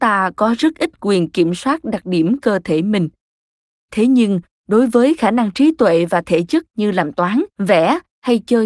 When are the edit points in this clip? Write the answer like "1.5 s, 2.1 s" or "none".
7.5 s

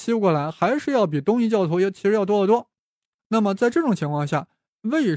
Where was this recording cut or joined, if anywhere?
none

